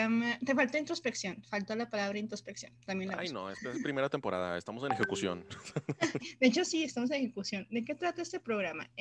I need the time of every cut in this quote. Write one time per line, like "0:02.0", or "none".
0:06.2

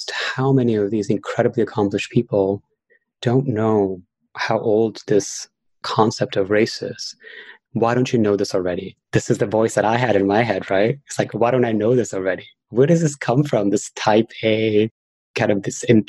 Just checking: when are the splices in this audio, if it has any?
0:07.7
0:09.0

